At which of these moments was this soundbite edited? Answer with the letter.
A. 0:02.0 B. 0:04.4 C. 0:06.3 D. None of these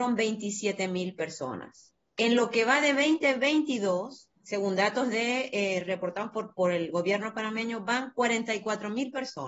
B